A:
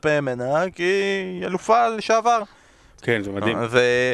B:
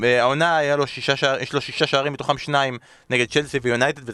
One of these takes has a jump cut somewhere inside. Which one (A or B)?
A